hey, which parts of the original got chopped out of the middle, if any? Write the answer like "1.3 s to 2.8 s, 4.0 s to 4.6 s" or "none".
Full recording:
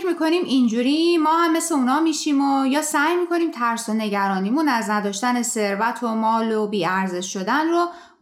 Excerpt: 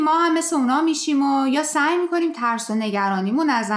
none